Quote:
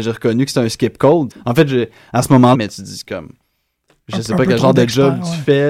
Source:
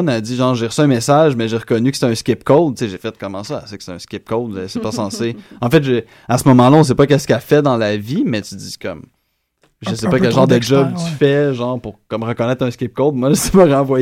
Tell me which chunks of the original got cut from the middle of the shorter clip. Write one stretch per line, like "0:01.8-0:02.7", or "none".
0:02.8-0:05.5
0:06.7-0:08.3